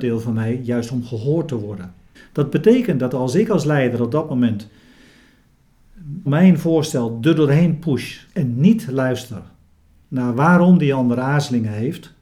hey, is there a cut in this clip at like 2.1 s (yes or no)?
yes